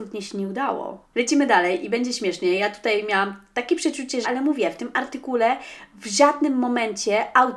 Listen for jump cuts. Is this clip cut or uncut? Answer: cut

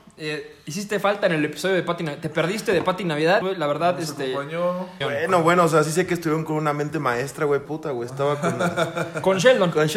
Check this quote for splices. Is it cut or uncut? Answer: cut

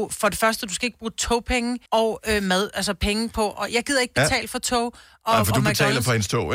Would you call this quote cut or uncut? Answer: cut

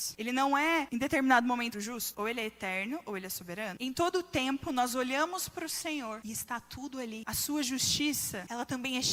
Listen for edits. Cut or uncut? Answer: cut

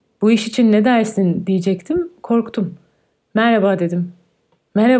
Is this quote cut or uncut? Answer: uncut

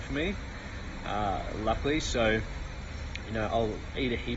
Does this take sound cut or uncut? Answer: uncut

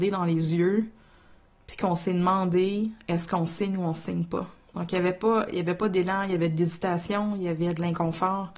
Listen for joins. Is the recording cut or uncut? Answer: uncut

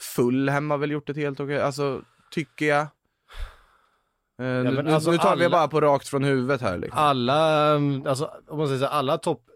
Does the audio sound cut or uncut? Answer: uncut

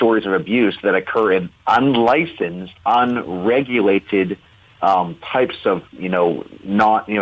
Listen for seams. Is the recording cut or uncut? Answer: cut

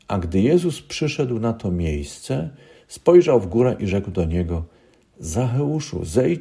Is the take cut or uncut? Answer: uncut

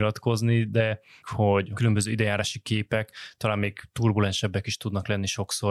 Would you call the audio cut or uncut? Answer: cut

